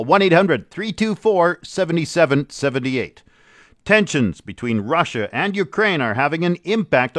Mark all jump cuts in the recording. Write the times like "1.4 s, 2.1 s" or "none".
none